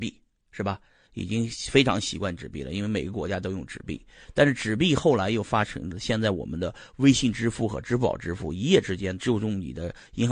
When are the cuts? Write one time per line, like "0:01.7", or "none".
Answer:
0:09.2